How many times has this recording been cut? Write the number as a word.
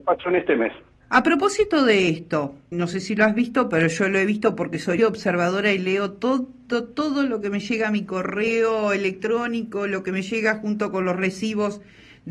two